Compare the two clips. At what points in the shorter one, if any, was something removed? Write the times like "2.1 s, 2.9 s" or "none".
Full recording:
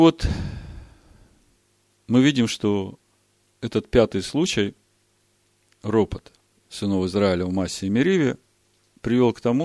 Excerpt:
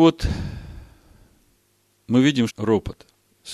2.5 s